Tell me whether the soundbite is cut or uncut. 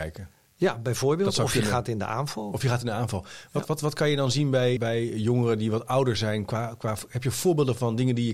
cut